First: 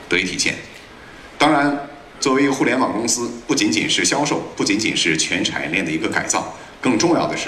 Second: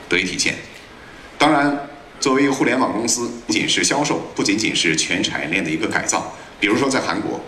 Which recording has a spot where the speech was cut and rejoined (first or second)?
second